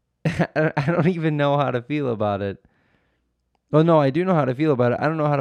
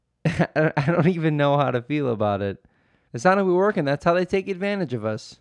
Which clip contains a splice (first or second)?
second